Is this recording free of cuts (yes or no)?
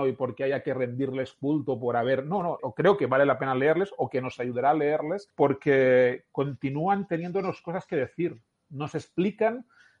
no